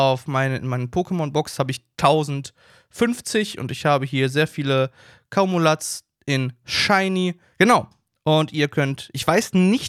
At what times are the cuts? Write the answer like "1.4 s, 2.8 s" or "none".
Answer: 7.5 s